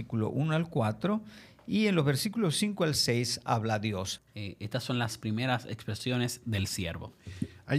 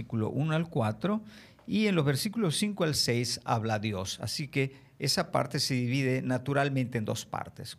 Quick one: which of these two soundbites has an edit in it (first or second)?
first